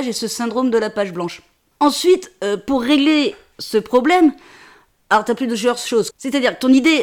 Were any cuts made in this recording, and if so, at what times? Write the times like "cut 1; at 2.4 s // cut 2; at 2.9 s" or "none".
cut 1; at 6.1 s